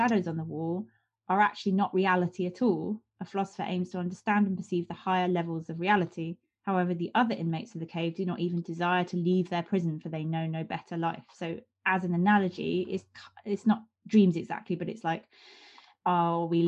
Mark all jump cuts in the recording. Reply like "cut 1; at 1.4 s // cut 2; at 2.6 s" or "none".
none